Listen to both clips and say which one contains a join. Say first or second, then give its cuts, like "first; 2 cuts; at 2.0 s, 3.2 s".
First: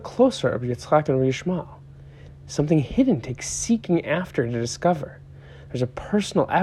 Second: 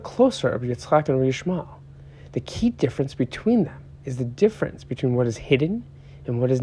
first; 1 cut; at 2.3 s